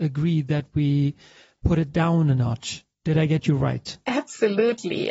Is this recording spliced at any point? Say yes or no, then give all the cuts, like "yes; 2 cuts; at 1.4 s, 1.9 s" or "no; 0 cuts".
no; 0 cuts